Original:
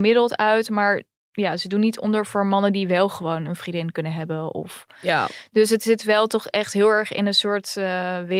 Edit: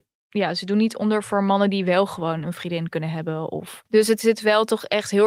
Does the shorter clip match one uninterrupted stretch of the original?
no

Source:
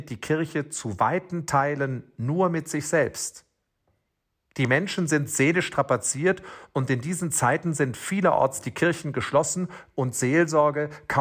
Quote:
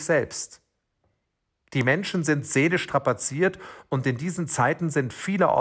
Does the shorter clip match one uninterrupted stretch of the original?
yes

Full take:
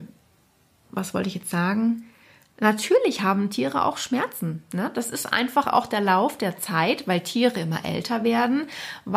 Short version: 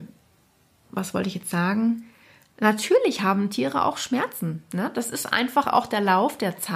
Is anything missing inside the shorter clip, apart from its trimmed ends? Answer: no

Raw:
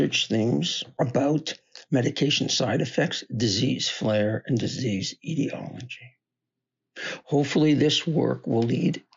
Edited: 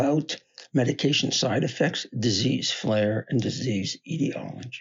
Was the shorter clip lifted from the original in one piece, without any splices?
yes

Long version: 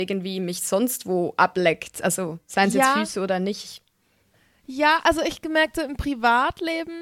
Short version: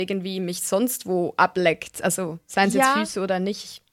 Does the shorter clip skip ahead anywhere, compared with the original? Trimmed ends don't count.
no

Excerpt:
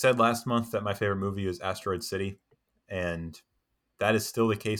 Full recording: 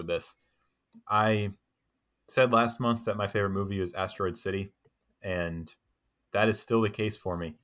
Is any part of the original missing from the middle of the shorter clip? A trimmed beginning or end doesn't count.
no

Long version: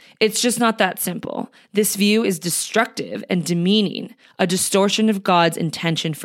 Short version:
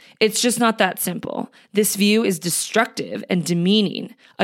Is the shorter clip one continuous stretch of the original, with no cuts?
yes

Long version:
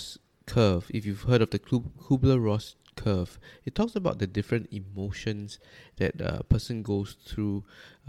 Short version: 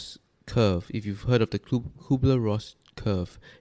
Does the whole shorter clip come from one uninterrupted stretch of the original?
yes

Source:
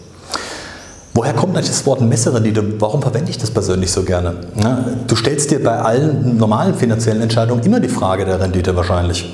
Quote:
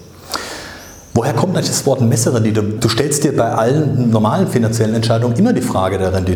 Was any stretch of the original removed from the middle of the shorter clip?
yes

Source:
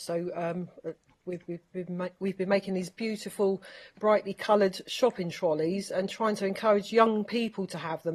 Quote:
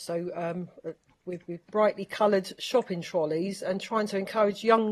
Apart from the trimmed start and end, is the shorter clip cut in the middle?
yes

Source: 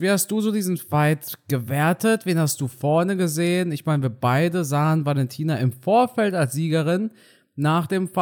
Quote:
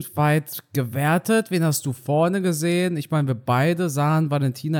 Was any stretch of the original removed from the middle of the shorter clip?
no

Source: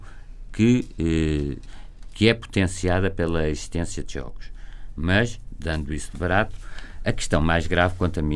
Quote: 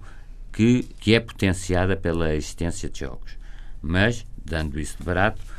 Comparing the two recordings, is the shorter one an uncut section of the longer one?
no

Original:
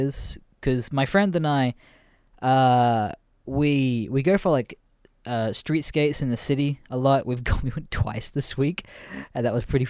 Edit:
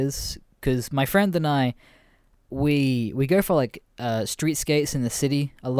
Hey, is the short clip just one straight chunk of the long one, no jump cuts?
no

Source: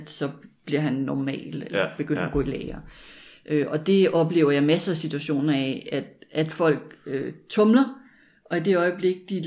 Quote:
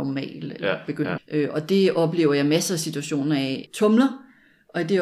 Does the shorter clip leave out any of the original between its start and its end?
yes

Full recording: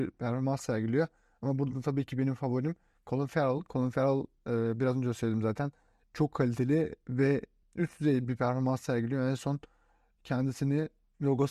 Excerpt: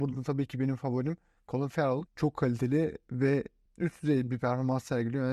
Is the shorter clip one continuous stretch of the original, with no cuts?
no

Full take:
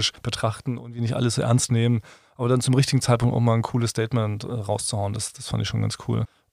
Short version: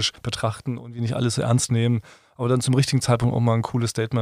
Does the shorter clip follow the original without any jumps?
yes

